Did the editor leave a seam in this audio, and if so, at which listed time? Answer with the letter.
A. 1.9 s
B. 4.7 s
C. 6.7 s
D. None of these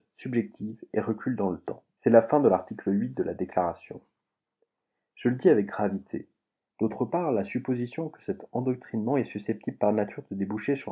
C